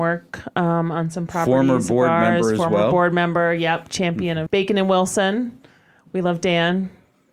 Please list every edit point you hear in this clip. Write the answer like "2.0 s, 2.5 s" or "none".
4.5 s